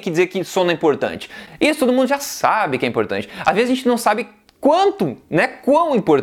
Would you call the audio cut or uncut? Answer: uncut